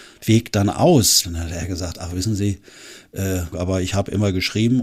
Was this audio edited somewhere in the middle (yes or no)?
yes